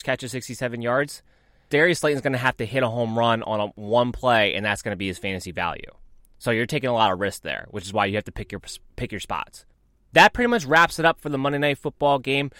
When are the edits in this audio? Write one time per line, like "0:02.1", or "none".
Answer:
0:01.7